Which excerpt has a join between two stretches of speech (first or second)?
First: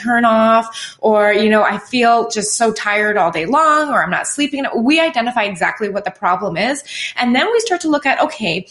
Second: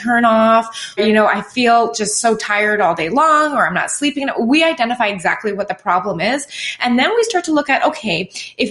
second